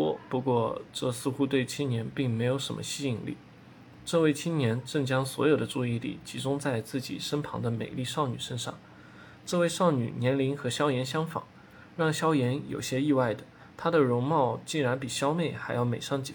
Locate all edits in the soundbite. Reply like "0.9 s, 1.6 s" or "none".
4.0 s